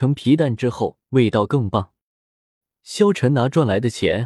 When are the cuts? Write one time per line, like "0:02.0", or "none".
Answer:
0:02.7